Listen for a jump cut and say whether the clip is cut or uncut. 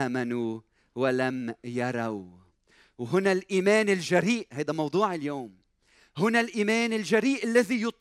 uncut